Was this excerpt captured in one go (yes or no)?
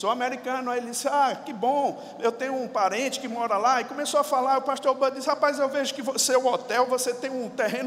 yes